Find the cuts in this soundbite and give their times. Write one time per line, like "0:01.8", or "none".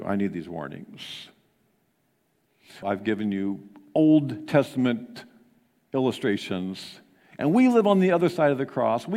0:02.8